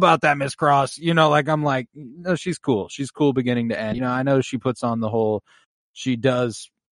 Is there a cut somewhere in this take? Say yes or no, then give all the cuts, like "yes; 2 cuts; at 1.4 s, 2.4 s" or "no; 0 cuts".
no; 0 cuts